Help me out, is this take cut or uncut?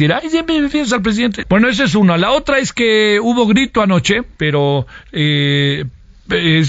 cut